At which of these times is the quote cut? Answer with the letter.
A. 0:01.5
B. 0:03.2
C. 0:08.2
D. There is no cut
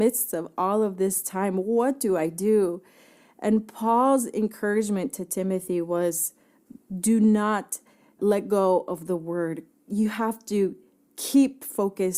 C